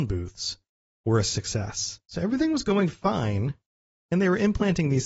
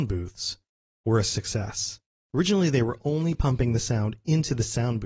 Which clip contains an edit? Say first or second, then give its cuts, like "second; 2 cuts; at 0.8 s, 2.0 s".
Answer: first; 1 cut; at 2.1 s